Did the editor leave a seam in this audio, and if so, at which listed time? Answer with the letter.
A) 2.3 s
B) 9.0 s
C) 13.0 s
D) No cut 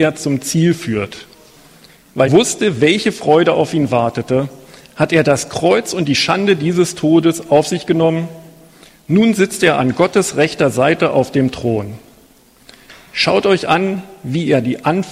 A